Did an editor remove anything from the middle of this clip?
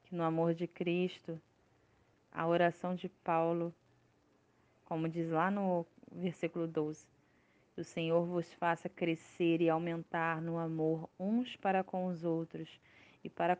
no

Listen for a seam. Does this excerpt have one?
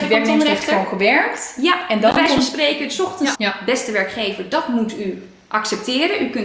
yes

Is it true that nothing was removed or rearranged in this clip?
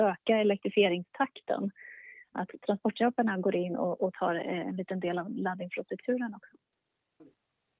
yes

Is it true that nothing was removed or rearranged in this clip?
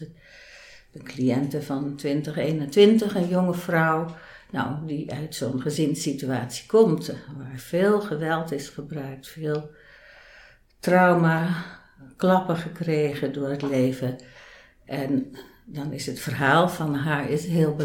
yes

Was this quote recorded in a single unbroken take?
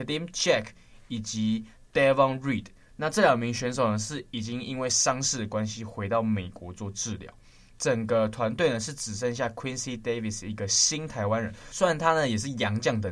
yes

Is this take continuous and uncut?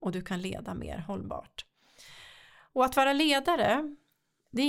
yes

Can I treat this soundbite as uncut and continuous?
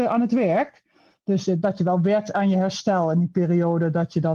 yes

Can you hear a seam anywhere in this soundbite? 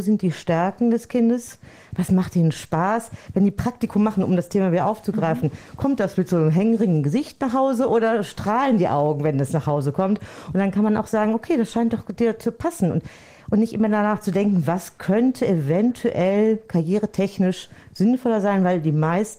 no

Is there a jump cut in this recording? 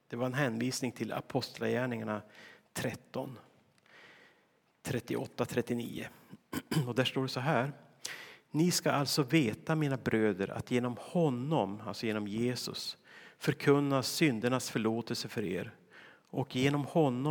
no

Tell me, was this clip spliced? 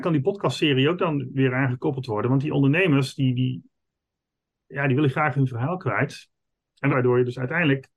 yes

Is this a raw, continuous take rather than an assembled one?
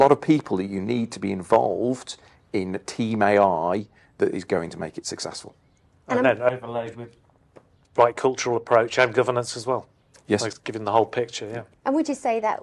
no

